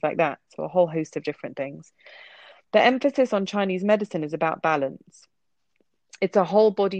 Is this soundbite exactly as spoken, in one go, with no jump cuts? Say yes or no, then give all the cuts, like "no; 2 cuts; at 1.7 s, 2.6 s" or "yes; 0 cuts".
yes; 0 cuts